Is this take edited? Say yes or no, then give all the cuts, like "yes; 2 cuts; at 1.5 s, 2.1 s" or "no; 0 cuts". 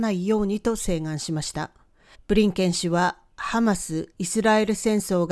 yes; 1 cut; at 2.1 s